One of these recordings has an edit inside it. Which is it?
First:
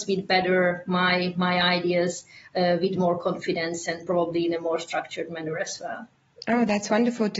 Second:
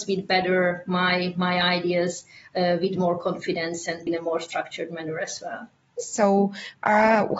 second; 2 cuts; at 4.1 s, 6.0 s

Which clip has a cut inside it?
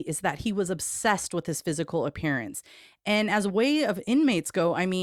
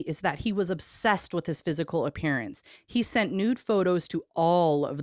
second; 1 cut; at 2.8 s

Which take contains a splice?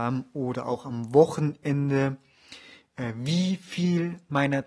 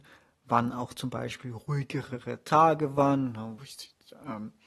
second; 1 cut; at 3.6 s

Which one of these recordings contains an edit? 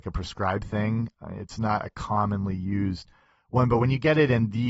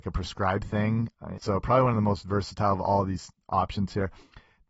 second; 1 cut; at 1.4 s

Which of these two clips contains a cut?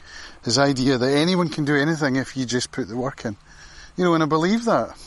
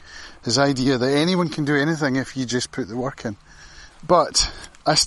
second; 1 cut; at 3.9 s

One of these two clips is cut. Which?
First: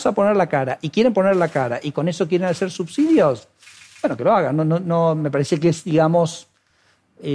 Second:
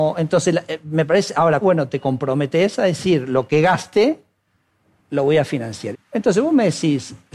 second; 2 cuts; at 1.6 s, 5.9 s

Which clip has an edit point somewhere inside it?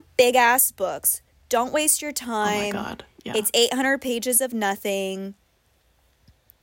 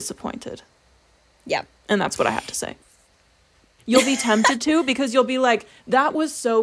second; 1 cut; at 3.8 s

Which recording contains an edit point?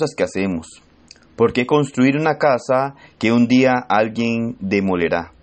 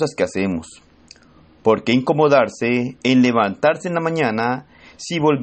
first; 1 cut; at 1.3 s

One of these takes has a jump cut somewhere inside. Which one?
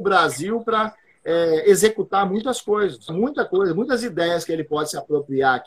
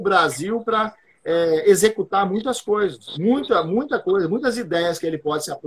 first; 1 cut; at 3.1 s

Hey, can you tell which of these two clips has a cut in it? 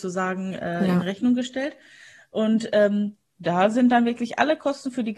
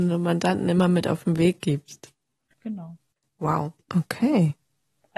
second; 2 cuts; at 2.5 s, 3.9 s

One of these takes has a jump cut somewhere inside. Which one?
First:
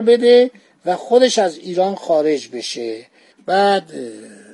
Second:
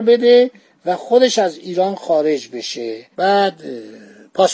second; 1 cut; at 3.1 s

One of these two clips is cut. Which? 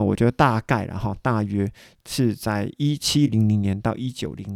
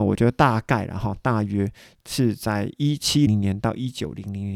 second; 1 cut; at 3.3 s

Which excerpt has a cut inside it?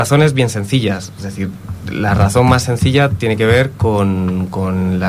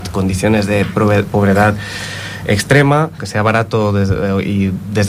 second; 1 cut; at 3.2 s

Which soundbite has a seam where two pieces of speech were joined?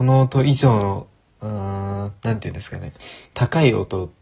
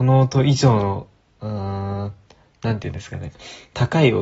first; 1 cut; at 2.2 s

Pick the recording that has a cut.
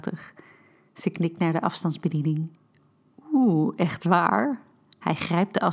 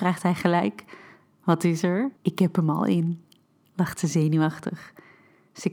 second; 1 cut; at 2.2 s

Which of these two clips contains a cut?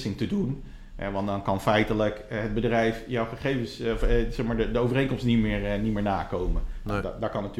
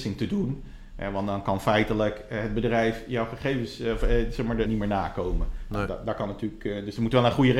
second; 1 cut; at 4.7 s

